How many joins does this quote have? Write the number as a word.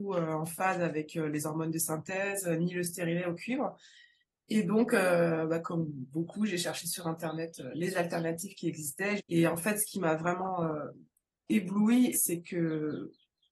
two